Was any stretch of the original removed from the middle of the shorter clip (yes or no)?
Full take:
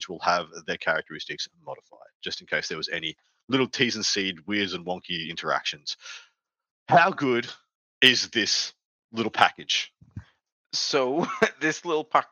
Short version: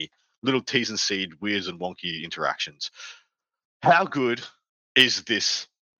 no